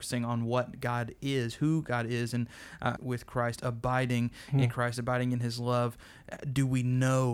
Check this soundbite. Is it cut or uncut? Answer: cut